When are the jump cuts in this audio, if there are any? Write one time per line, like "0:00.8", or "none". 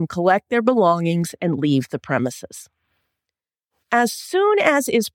0:03.8